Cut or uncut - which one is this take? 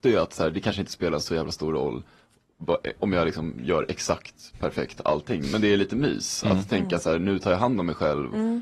uncut